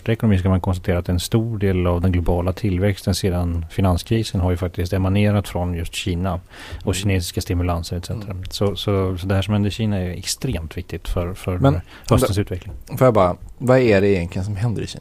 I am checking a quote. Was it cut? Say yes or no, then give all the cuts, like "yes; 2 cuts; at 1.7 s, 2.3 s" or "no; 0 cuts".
no; 0 cuts